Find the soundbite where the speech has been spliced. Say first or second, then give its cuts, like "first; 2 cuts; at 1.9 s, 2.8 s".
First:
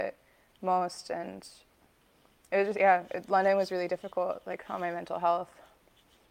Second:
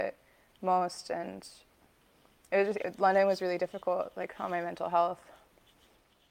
second; 1 cut; at 2.8 s